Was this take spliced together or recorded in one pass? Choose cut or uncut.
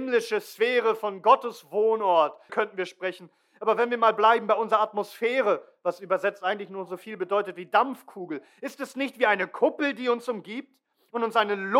cut